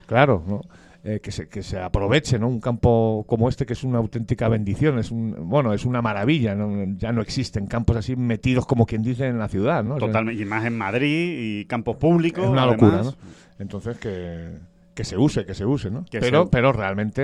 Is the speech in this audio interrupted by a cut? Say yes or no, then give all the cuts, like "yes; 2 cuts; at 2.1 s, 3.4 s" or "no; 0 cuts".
no; 0 cuts